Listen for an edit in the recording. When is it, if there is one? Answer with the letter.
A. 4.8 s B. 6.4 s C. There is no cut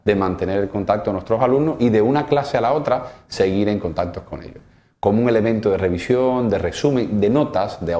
C